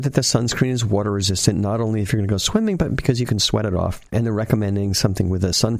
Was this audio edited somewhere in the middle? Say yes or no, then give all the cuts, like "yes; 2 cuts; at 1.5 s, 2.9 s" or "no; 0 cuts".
yes; 1 cut; at 4.1 s